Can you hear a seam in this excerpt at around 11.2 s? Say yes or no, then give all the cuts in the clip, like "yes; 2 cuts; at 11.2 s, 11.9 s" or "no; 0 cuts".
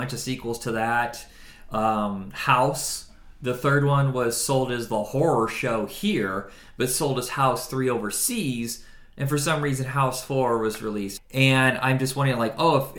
yes; 1 cut; at 11.2 s